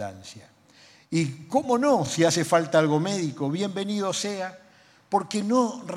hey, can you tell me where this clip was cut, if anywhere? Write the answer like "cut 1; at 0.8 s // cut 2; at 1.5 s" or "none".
none

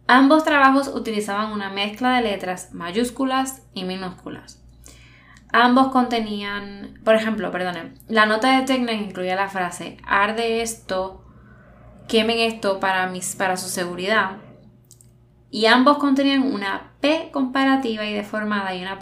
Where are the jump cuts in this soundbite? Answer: none

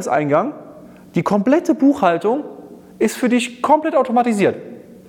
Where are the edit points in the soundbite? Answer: none

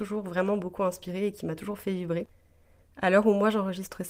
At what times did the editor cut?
cut 1; at 2.8 s

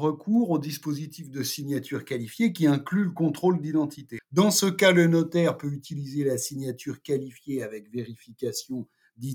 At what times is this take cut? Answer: cut 1; at 4.2 s

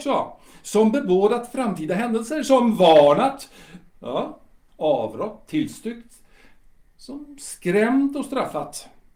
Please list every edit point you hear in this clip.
cut 1; at 4.7 s

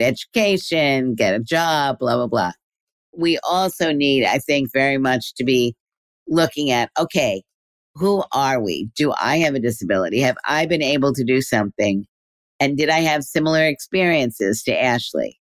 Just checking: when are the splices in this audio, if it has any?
none

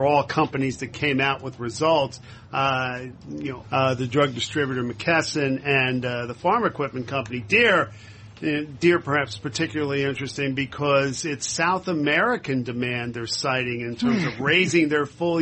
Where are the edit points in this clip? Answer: cut 1; at 3.6 s

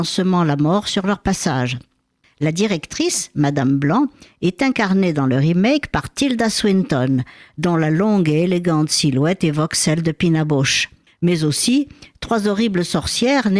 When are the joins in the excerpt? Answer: cut 1; at 2.2 s // cut 2; at 11.1 s

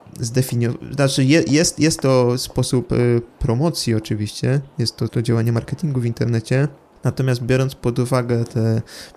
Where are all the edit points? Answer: cut 1; at 5.1 s

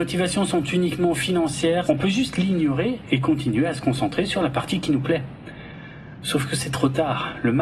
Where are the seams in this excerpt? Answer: cut 1; at 1.9 s // cut 2; at 6.2 s

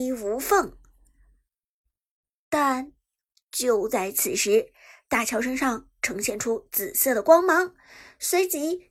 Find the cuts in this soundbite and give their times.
none

